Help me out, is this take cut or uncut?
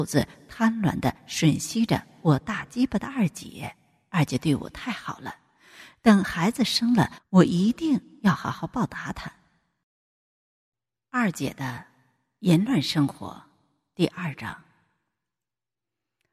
uncut